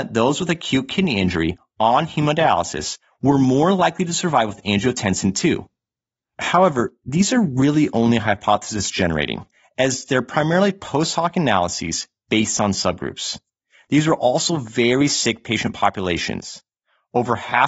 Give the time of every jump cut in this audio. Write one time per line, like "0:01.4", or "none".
none